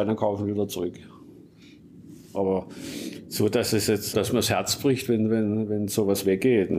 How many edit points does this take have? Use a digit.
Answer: 1